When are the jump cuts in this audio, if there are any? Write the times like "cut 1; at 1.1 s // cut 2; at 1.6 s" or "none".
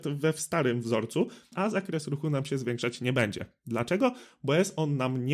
cut 1; at 1.5 s